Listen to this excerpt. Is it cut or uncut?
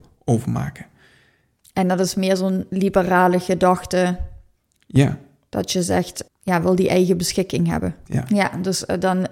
cut